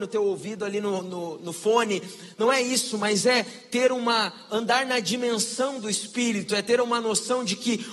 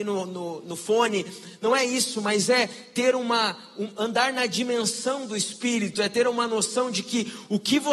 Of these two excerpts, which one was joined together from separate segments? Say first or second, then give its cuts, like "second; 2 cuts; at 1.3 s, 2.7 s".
first; 1 cut; at 4.5 s